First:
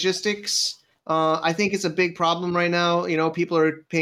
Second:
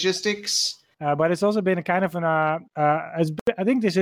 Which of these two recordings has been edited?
second; 2 cuts; at 0.9 s, 2.7 s

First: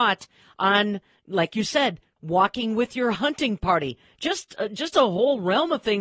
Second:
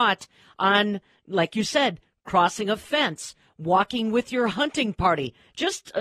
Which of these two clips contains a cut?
first; 1 cut; at 2.2 s

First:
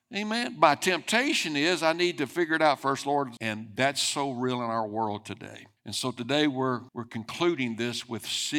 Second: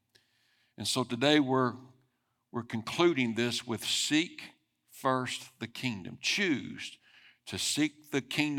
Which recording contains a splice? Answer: first; 3 cuts; at 3.4 s, 5.8 s, 6.9 s

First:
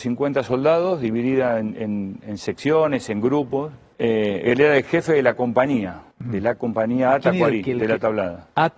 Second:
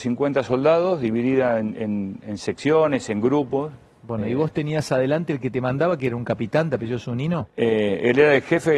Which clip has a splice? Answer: first; 2 cuts; at 3.9 s, 6.1 s

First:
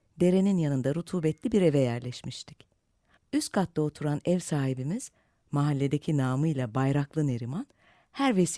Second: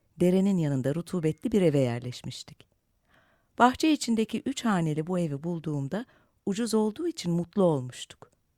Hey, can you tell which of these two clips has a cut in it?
first; 1 cut; at 3.2 s

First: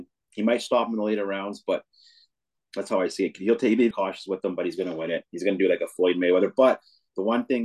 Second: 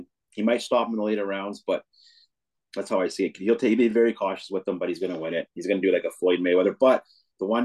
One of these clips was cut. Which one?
first; 1 cut; at 3.9 s

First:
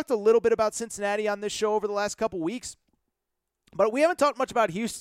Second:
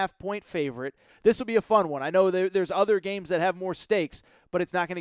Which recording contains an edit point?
second; 1 cut; at 1.1 s

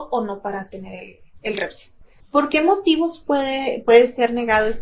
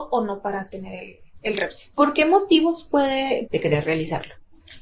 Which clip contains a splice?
second; 2 cuts; at 1.9 s, 3.5 s

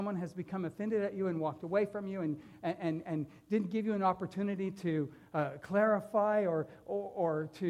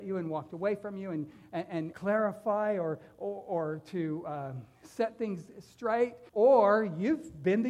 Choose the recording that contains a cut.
second; 2 cuts; at 1.9 s, 6.3 s

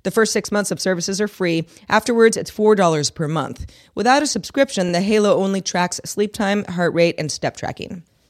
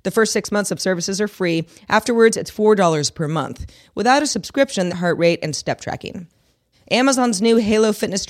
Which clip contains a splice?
second; 2 cuts; at 4.9 s, 6.7 s

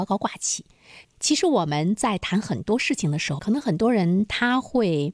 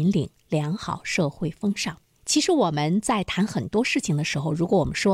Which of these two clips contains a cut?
first; 2 cuts; at 1.0 s, 3.4 s

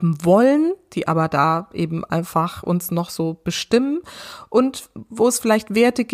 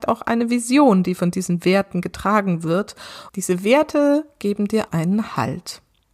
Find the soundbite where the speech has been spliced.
second; 2 cuts; at 3.3 s, 4.9 s

